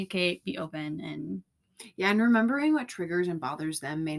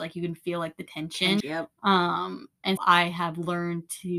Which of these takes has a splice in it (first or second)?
second